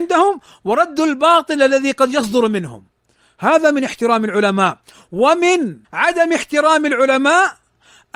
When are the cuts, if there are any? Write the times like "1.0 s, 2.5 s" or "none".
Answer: 5.8 s